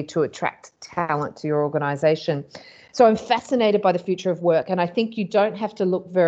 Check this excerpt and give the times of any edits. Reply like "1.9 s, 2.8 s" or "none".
none